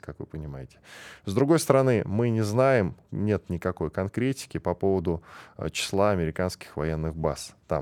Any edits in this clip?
yes; 2 cuts; at 1.2 s, 3.0 s

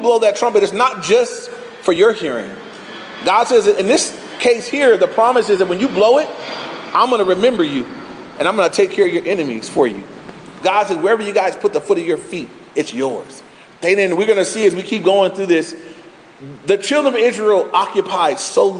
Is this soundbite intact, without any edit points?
no; 2 cuts; at 10.6 s, 13.7 s

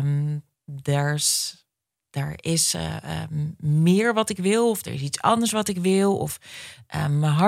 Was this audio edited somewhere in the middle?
no; 0 cuts

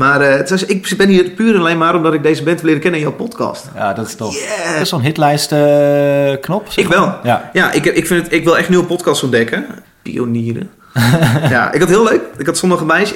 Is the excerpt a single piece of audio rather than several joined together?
no; 2 cuts; at 4.8 s, 9.8 s

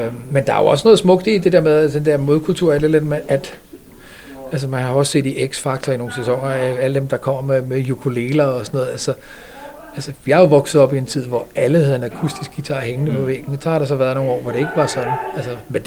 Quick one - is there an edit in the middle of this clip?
no; 0 cuts

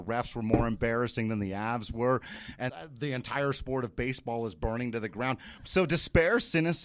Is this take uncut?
no; 2 cuts; at 2.7 s, 5.6 s

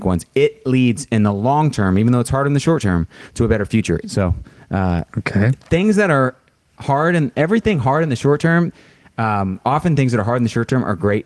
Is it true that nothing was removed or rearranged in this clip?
no; 1 cut; at 4.0 s

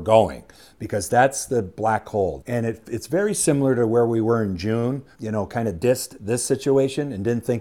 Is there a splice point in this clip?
yes; 2 cuts; at 2.4 s, 5.1 s

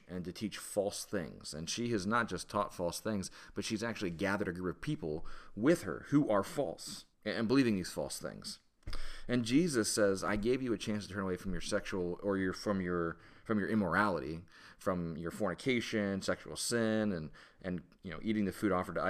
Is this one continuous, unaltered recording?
no; 1 cut; at 7.1 s

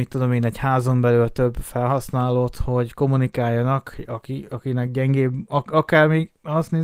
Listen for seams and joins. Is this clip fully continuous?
yes; 0 cuts

